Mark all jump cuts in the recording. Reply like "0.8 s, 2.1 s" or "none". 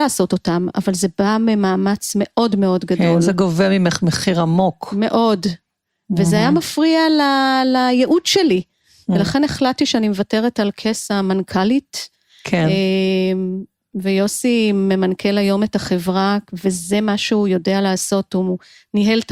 none